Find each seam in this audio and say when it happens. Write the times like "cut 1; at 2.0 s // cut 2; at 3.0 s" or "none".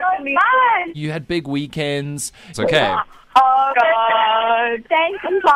cut 1; at 0.9 s // cut 2; at 2.5 s // cut 3; at 3.7 s